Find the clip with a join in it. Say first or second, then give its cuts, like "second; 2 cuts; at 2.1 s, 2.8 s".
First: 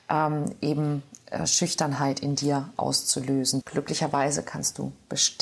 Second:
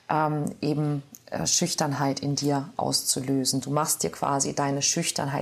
first; 1 cut; at 3.6 s